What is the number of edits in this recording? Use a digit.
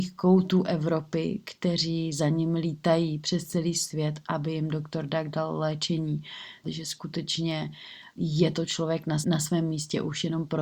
3